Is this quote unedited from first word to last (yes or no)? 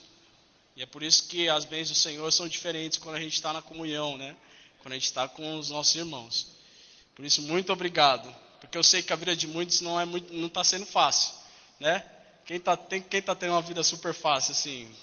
yes